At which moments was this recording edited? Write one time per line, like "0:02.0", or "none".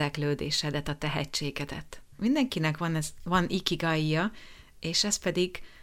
0:02.2

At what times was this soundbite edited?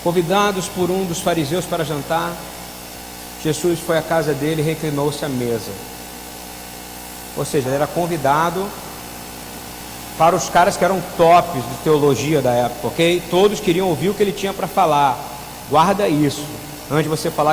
0:07.6

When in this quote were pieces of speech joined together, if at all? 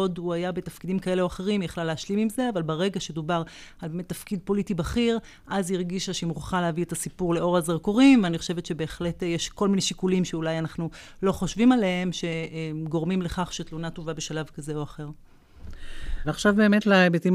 0:16.2

